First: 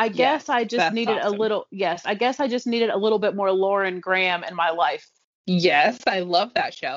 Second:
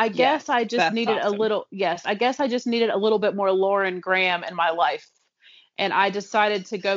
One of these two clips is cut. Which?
first; 1 cut; at 5.2 s

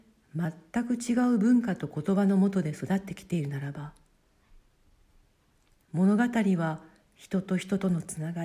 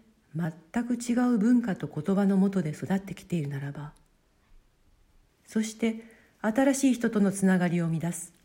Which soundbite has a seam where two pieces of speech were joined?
second; 1 cut; at 5.3 s

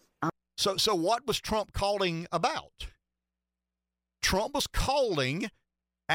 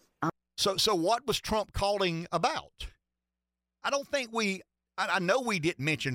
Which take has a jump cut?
second; 1 cut; at 3.8 s

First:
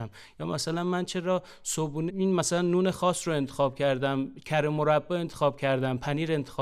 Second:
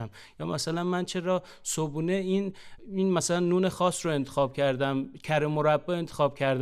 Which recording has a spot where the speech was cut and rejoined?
first; 1 cut; at 2.1 s

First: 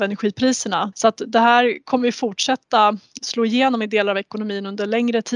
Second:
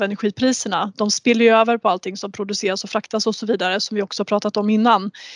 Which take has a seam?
first; 1 cut; at 0.9 s

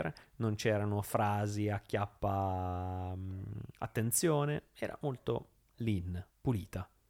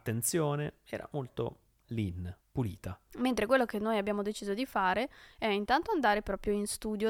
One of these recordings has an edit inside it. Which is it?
second; 1 cut; at 3.1 s

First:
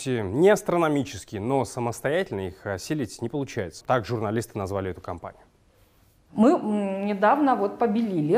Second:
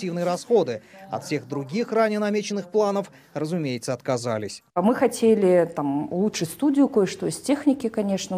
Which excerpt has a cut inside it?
first; 1 cut; at 3.8 s

